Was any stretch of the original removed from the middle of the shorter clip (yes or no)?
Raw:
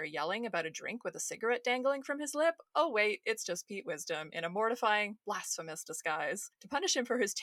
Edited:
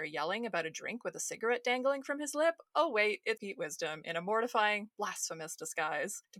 yes